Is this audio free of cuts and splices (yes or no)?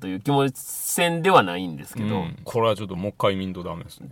no